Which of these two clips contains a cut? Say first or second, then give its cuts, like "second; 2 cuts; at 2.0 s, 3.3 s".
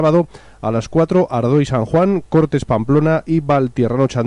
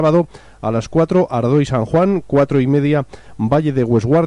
first; 1 cut; at 2.3 s